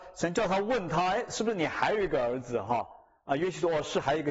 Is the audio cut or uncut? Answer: uncut